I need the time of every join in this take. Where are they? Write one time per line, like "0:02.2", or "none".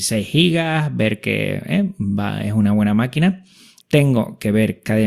0:03.8